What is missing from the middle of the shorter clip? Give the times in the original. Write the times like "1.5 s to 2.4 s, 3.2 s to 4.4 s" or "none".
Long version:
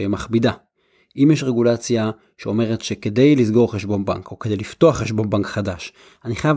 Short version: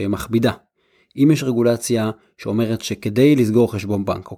none